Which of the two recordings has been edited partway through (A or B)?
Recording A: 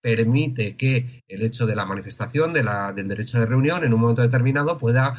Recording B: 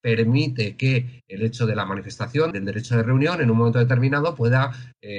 B